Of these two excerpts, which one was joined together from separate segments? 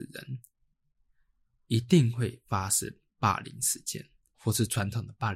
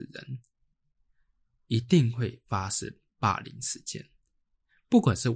first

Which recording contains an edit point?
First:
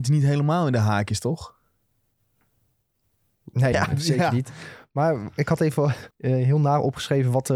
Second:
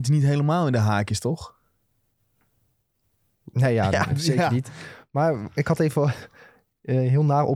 first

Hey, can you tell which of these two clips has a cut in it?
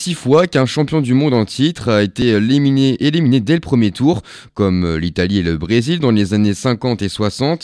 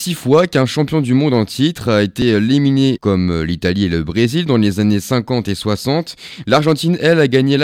second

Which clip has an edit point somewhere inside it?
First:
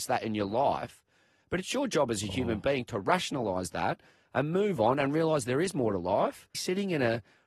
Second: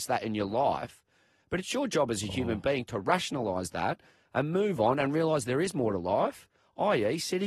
first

